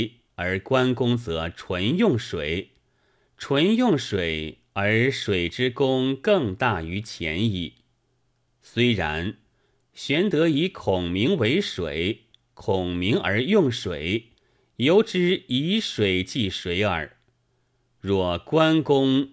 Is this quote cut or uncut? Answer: uncut